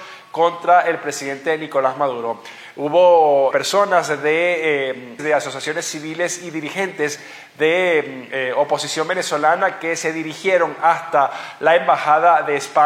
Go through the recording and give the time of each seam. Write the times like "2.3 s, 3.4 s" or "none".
3.5 s, 5.2 s